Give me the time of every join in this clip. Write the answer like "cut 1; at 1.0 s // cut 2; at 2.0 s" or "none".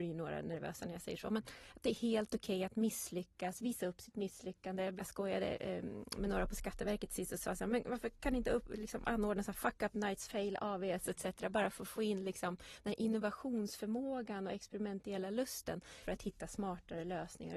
cut 1; at 5.0 s // cut 2; at 16.0 s